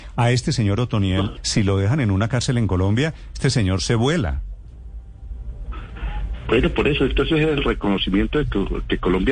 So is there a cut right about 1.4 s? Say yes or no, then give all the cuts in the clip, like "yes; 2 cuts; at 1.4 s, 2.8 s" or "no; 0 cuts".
yes; 1 cut; at 1.4 s